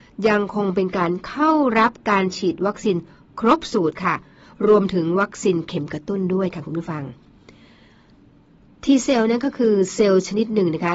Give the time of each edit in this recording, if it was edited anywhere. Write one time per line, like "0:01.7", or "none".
none

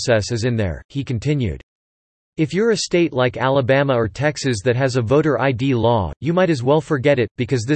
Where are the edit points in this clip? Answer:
none

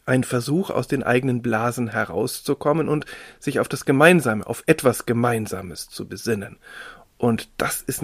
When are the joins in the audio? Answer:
none

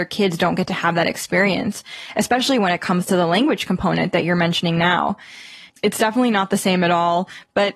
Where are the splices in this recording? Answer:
none

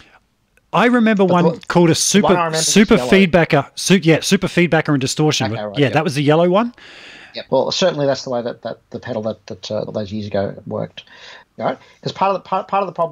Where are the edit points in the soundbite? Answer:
0:07.5
0:09.9
0:11.4

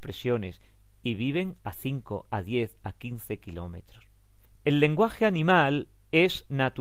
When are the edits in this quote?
none

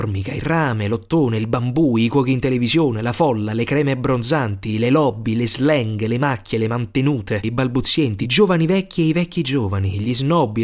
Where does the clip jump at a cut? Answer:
0:07.4

